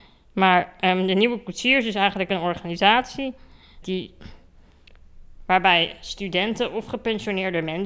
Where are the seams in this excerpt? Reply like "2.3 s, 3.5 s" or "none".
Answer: 3.8 s